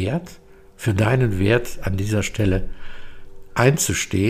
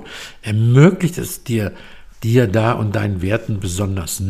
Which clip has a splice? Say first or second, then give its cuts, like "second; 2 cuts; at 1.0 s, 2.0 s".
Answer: second; 1 cut; at 2.1 s